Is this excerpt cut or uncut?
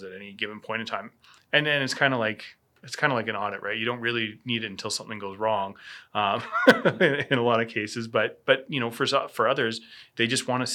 uncut